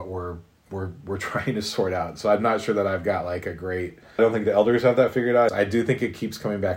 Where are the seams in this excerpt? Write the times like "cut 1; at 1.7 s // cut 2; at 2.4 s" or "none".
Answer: cut 1; at 4.2 s // cut 2; at 5.5 s